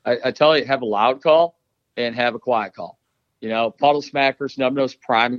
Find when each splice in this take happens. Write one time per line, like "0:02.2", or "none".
none